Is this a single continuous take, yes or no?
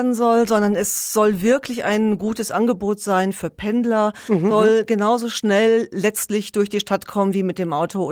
no